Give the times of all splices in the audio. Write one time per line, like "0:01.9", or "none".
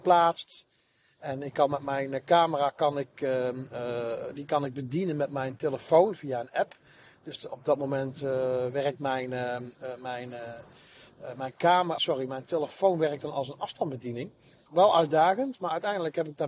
0:12.0
0:14.7

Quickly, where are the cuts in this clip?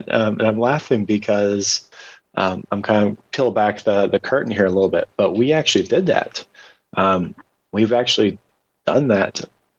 none

